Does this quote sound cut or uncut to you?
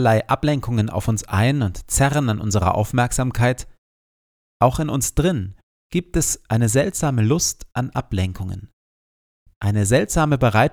uncut